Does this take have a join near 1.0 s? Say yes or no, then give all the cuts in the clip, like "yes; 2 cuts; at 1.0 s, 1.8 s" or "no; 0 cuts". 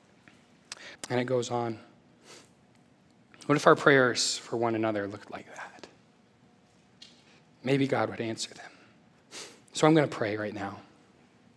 yes; 1 cut; at 1.0 s